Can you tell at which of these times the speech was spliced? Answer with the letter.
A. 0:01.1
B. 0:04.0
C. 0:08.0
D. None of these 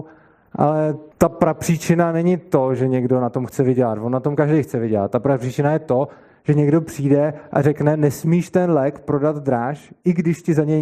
A